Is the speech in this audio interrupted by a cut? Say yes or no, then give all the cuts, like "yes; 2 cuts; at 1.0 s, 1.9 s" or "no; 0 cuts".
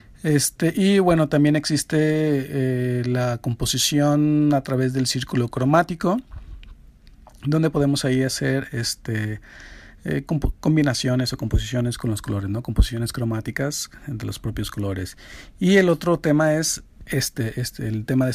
no; 0 cuts